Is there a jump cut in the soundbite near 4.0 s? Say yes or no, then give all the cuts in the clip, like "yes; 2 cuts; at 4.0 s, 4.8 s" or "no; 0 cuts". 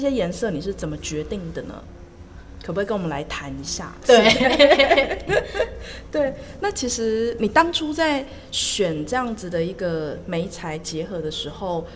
yes; 1 cut; at 4.0 s